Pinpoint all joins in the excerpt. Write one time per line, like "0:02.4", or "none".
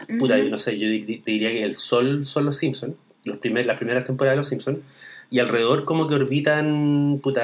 none